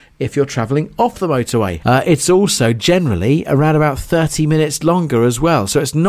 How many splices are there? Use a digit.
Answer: 1